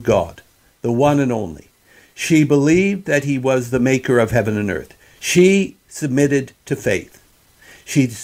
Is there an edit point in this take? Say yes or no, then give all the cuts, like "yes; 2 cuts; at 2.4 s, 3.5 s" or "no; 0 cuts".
yes; 1 cut; at 5.2 s